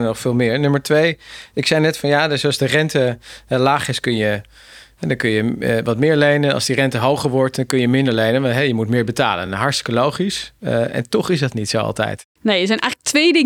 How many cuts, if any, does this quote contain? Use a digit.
0